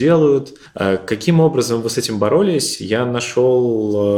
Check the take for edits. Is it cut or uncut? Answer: uncut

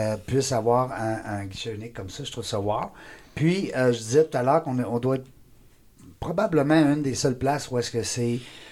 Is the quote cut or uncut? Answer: uncut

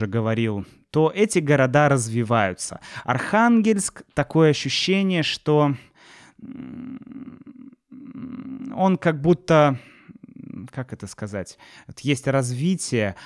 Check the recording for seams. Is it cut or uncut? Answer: uncut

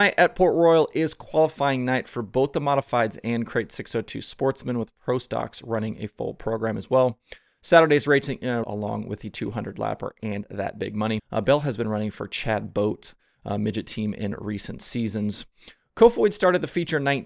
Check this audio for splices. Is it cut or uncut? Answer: cut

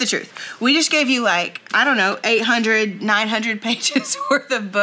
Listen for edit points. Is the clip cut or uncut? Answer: uncut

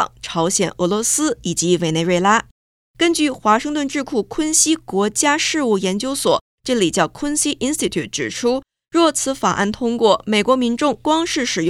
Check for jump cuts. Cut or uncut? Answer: uncut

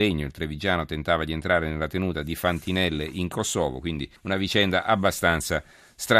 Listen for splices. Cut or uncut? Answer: cut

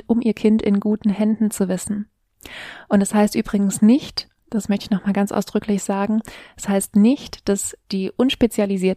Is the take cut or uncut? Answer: uncut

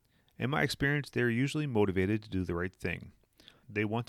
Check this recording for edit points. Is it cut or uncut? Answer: uncut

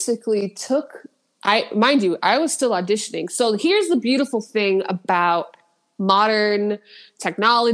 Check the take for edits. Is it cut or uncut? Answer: uncut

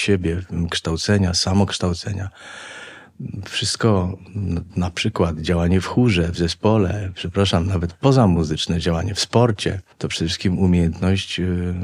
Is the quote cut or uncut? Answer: cut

